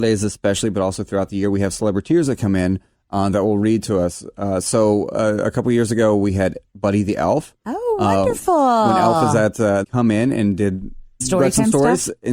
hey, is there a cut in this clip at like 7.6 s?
no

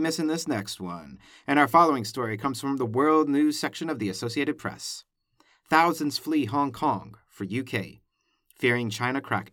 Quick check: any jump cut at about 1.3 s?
no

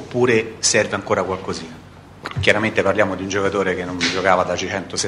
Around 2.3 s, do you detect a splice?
yes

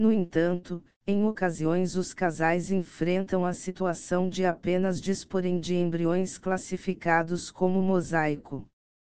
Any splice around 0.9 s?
no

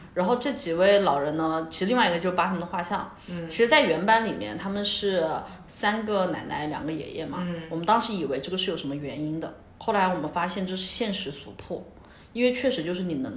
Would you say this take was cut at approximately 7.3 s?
no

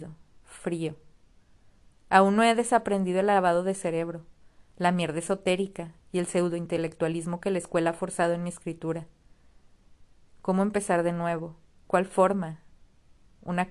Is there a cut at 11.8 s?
yes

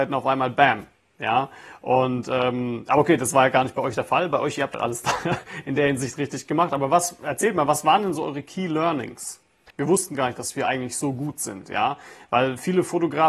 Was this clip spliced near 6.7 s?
no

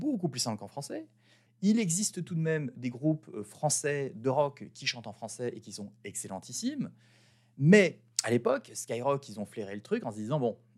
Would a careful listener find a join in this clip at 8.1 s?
yes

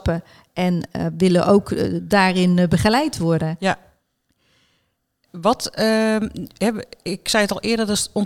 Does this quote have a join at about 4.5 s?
no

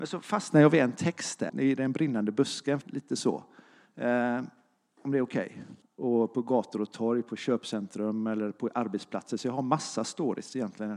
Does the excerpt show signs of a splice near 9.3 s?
no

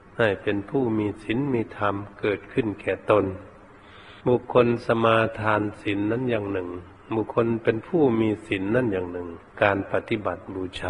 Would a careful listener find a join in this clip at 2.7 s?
no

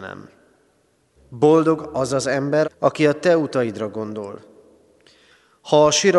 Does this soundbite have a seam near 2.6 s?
yes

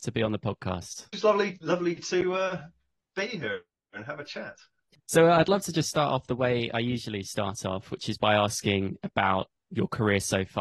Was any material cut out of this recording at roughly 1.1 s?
yes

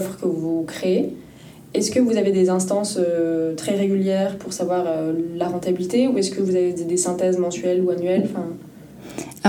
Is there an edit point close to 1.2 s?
no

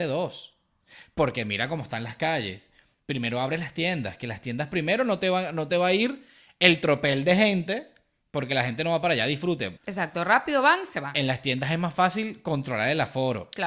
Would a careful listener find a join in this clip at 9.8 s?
yes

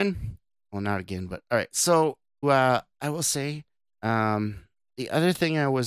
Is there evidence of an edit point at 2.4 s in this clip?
yes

